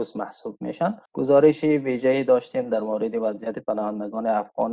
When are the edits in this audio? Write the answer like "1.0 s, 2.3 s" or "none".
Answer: 1.1 s

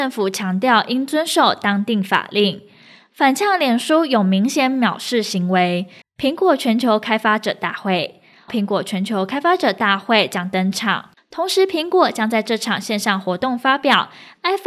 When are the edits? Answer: 6.0 s, 8.5 s, 11.2 s

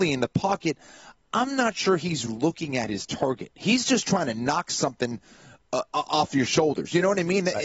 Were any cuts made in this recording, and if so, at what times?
2.3 s

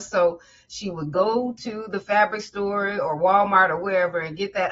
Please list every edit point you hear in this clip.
none

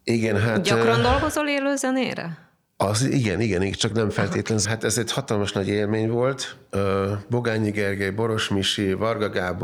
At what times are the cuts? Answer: 4.6 s

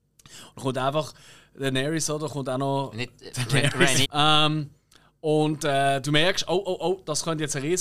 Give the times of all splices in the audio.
4.0 s

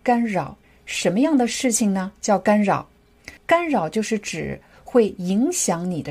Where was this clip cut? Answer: 3.4 s

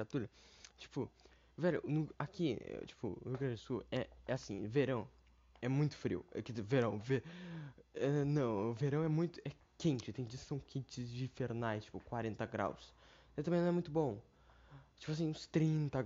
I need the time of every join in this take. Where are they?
none

